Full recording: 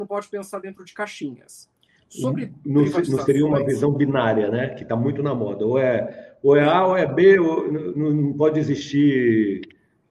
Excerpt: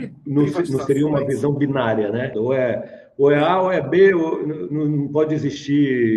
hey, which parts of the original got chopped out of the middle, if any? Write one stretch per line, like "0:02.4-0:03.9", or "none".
0:04.7-0:05.6